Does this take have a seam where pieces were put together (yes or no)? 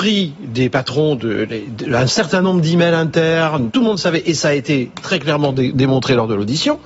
yes